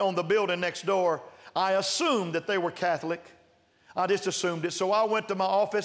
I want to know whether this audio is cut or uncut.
uncut